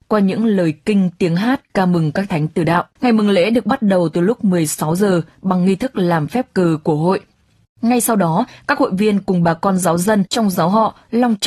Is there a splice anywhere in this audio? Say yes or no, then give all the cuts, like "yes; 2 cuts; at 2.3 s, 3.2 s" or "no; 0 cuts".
yes; 1 cut; at 3.0 s